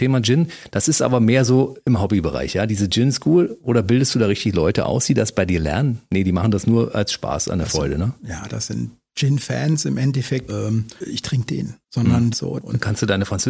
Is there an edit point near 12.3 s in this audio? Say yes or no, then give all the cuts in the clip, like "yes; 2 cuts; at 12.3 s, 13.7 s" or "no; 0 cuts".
yes; 3 cuts; at 8.5 s, 10.5 s, 12.3 s